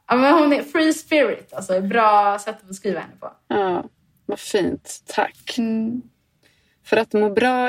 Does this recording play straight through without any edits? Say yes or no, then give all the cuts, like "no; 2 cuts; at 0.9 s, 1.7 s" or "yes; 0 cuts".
yes; 0 cuts